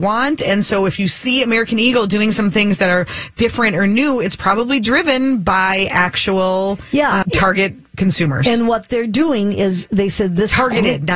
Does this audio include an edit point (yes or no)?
yes